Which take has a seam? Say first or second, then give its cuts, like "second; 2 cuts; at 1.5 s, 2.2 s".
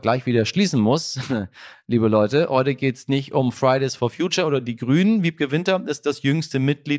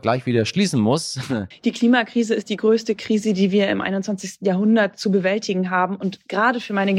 second; 1 cut; at 1.5 s